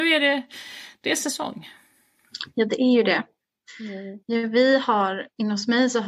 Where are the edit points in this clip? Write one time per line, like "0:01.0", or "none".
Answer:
0:04.2